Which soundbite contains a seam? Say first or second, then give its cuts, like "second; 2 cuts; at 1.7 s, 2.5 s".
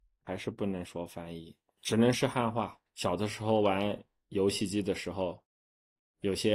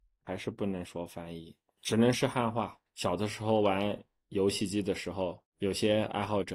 second; 1 cut; at 5.5 s